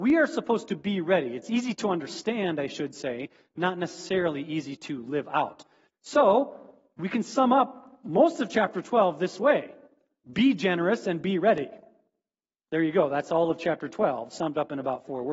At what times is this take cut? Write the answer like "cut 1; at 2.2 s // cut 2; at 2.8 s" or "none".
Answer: cut 1; at 5.9 s